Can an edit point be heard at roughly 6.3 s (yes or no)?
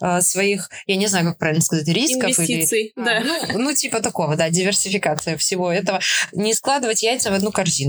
no